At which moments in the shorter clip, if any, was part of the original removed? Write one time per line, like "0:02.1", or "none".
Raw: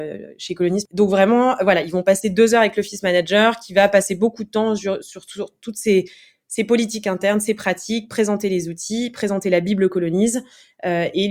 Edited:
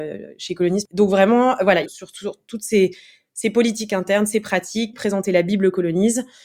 0:01.9
0:04.9